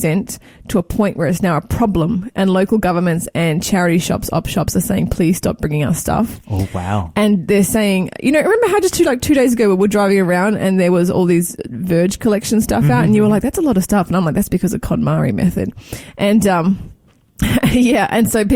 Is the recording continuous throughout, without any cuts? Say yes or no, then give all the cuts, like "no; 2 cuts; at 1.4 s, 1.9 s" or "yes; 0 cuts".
yes; 0 cuts